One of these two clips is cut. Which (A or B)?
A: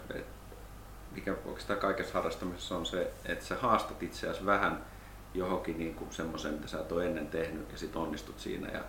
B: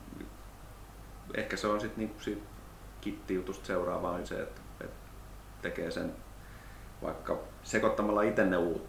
B